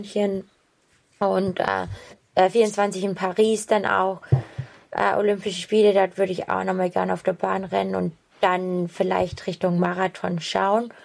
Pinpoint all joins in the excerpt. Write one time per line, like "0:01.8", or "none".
0:02.1